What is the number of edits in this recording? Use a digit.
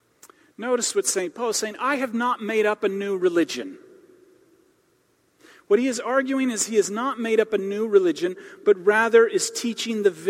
1